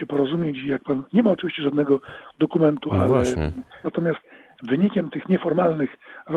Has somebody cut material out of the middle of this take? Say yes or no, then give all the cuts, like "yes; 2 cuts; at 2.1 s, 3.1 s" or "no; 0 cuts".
yes; 1 cut; at 3.8 s